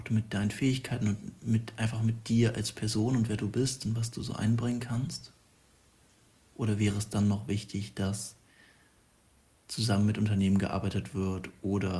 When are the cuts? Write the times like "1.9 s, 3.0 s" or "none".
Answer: none